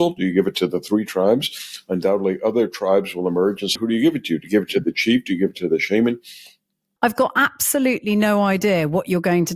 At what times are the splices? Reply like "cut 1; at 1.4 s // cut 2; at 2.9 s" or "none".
cut 1; at 3.8 s // cut 2; at 7.0 s